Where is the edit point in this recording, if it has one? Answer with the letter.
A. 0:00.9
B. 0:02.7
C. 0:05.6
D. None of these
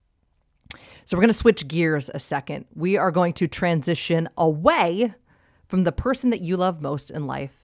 D